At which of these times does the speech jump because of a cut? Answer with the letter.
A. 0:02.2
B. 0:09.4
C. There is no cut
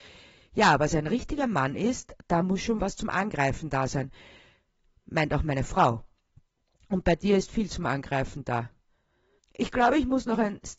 B